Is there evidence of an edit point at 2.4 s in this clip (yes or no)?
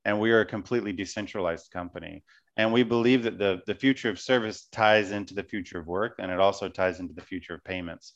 no